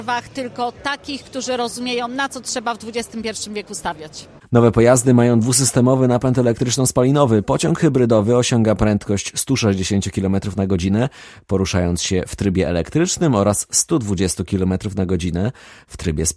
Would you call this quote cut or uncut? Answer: uncut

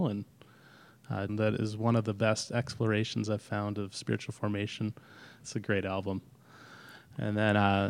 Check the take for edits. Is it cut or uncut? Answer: cut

